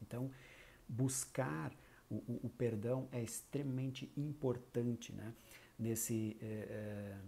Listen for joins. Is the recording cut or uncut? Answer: uncut